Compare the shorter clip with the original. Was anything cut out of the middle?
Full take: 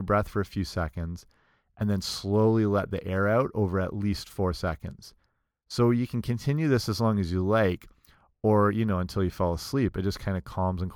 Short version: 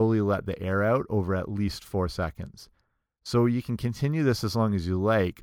no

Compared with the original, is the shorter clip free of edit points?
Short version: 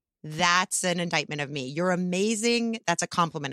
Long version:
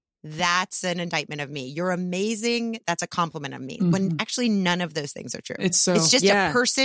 yes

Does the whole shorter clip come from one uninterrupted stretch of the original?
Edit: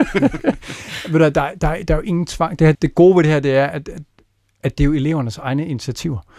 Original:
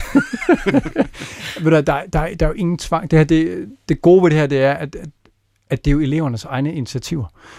no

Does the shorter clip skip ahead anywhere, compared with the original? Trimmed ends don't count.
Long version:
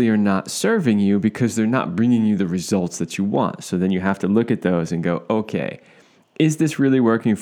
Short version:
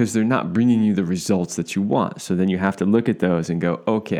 no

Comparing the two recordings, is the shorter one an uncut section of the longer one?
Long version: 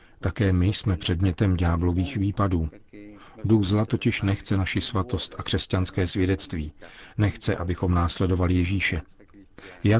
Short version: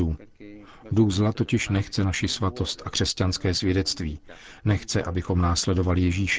yes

